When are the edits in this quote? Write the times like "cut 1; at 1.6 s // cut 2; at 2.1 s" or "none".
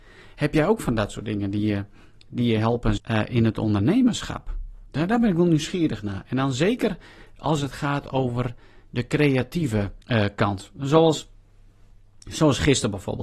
cut 1; at 3.0 s